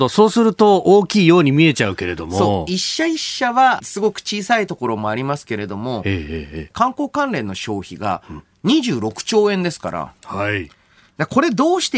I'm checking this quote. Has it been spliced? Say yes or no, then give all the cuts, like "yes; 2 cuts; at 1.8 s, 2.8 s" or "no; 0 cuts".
yes; 3 cuts; at 3.8 s, 6.7 s, 10.2 s